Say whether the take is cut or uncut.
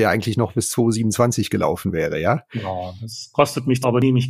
uncut